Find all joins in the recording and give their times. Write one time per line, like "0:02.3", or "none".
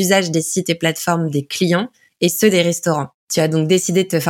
0:03.2